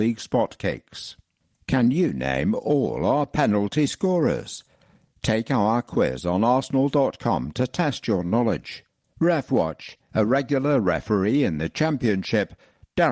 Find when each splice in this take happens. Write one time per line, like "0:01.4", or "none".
0:10.1

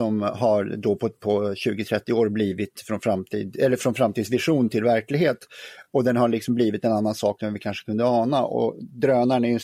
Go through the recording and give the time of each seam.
none

